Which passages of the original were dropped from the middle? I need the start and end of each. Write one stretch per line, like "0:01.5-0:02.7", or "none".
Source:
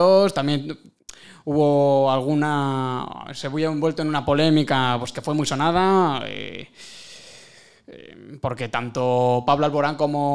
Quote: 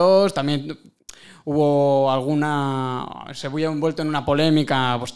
none